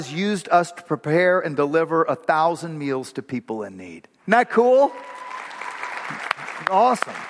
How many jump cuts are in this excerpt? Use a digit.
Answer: 1